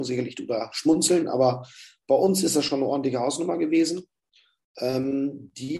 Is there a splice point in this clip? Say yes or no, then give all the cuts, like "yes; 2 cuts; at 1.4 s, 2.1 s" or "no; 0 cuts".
yes; 1 cut; at 4.6 s